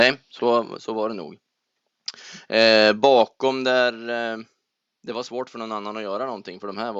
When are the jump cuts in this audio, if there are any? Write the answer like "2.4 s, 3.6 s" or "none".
none